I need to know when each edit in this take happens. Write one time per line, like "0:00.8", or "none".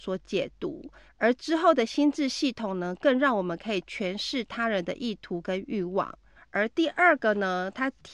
0:01.1
0:06.4